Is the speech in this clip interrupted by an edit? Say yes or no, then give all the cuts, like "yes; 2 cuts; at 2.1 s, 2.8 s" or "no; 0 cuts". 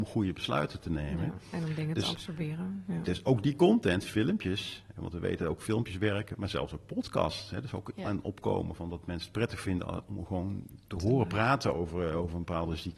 no; 0 cuts